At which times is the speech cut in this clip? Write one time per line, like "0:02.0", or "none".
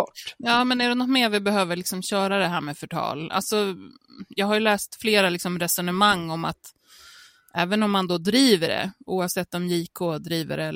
none